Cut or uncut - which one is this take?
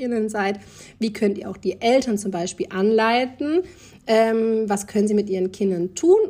uncut